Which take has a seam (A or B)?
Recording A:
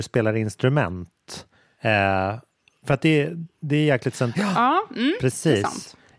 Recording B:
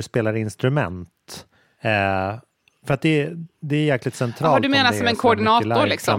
A